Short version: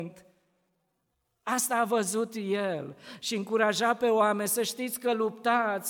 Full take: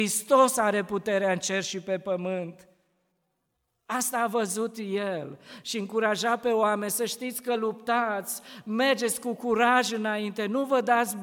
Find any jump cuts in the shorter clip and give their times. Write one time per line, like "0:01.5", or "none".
none

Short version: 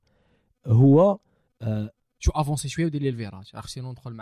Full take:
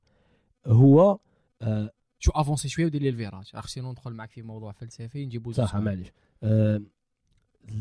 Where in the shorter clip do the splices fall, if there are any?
none

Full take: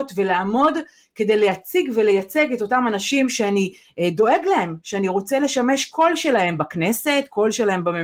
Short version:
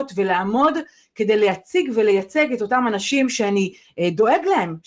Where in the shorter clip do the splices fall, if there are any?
none

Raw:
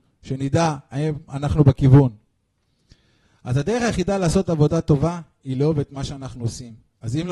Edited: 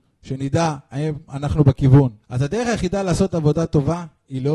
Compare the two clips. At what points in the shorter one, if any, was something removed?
0:02.2

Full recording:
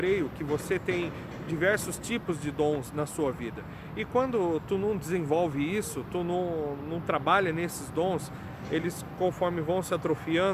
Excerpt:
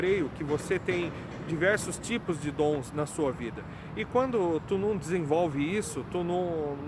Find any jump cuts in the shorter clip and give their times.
none

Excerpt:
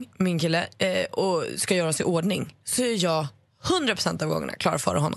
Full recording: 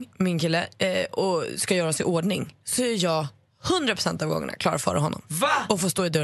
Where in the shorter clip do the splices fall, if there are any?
none

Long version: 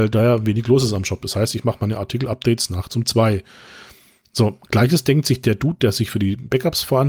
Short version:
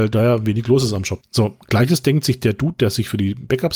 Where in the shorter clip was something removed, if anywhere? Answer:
0:01.2

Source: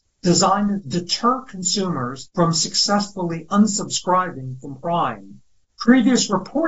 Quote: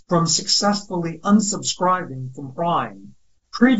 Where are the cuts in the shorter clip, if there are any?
none

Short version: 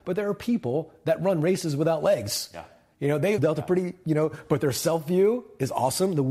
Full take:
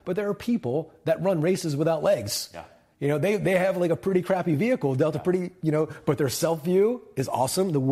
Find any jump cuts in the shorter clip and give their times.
0:03.4

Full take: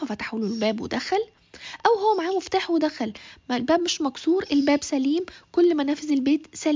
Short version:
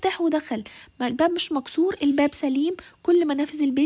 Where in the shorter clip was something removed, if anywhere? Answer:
none

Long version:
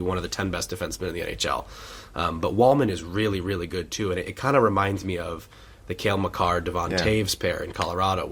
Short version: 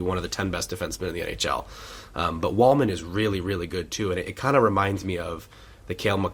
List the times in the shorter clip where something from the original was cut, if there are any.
none

